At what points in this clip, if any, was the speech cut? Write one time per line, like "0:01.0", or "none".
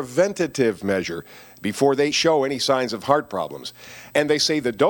0:02.1